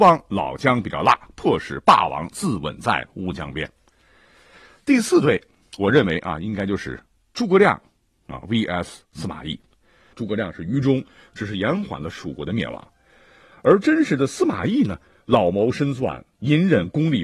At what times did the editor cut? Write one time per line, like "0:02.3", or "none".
0:10.1